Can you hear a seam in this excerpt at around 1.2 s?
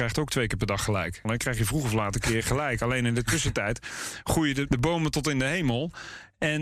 yes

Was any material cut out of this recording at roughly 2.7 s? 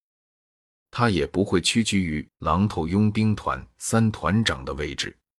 no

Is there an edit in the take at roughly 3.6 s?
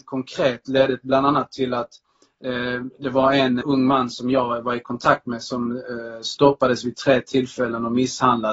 yes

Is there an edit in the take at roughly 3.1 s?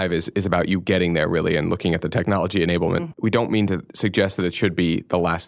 yes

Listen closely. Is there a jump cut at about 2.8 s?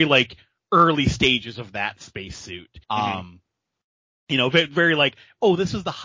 yes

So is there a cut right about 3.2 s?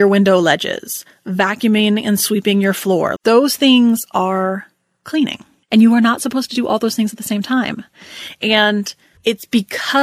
yes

